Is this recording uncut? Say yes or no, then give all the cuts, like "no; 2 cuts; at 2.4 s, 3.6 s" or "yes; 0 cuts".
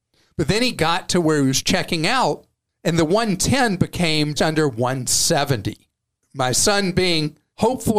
no; 1 cut; at 4.4 s